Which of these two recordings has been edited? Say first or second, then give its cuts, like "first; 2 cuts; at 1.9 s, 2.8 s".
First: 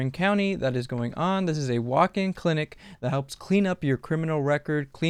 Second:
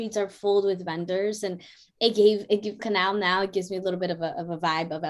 second; 1 cut; at 2.8 s